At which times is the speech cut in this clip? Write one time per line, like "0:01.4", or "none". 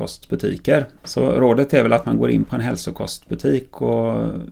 0:01.0